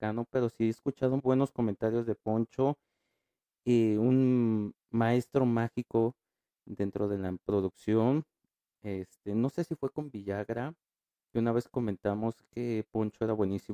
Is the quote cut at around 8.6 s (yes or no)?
no